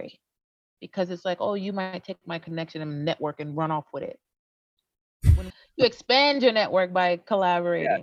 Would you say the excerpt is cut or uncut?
cut